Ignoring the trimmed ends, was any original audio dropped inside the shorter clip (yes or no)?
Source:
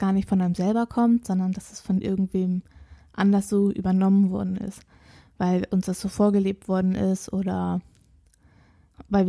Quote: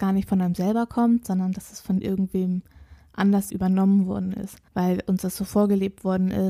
yes